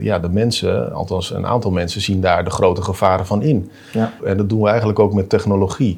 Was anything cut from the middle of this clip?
yes; 1 cut; at 4.2 s

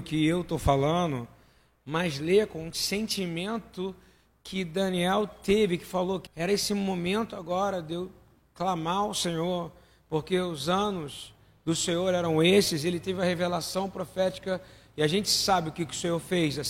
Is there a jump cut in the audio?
yes; 1 cut; at 6.3 s

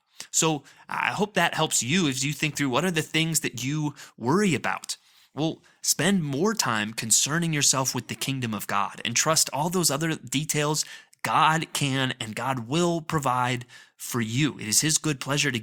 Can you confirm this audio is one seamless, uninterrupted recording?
yes; 0 cuts

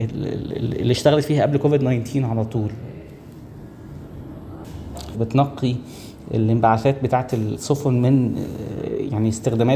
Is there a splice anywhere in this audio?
yes; 1 cut; at 5.1 s

